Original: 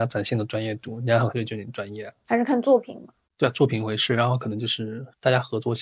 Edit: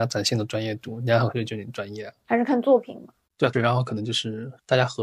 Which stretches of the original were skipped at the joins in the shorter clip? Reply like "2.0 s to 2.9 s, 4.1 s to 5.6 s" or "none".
3.5 s to 4.1 s